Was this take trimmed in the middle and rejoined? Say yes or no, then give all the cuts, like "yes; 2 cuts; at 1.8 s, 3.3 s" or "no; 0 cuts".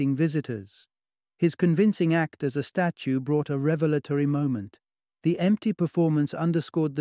no; 0 cuts